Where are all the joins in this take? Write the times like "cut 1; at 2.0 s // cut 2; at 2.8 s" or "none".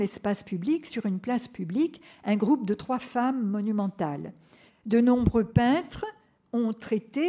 cut 1; at 4.7 s